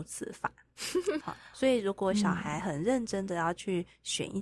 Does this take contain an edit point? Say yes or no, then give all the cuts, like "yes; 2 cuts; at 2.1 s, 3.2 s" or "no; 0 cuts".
yes; 1 cut; at 1.2 s